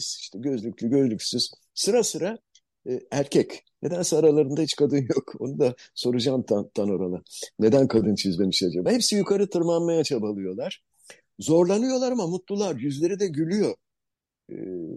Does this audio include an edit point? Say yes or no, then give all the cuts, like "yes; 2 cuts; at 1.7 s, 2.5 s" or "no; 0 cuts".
no; 0 cuts